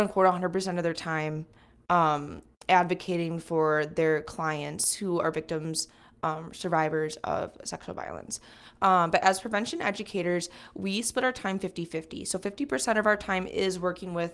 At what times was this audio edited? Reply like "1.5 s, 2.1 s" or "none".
none